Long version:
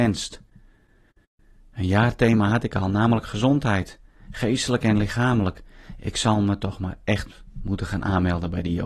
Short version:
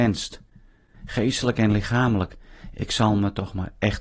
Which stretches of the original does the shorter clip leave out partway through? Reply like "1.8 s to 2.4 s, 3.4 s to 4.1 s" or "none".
0.9 s to 4.2 s